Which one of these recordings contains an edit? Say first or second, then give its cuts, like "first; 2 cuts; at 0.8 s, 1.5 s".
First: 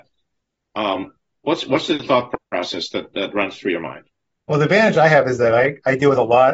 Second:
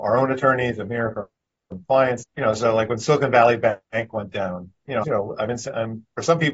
second; 2 cuts; at 2.2 s, 5.0 s